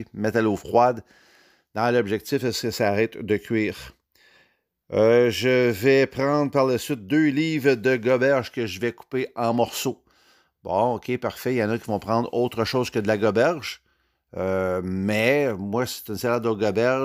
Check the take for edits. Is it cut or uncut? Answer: uncut